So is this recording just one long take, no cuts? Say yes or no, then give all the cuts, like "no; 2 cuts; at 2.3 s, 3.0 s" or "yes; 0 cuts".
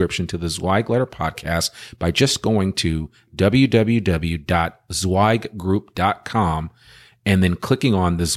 yes; 0 cuts